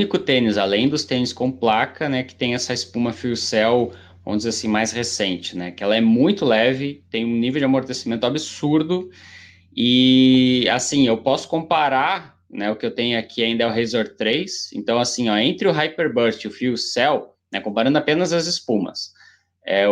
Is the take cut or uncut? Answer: uncut